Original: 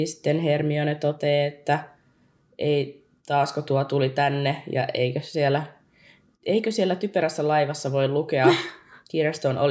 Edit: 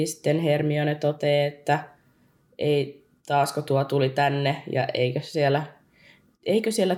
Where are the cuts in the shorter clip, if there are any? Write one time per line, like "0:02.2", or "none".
none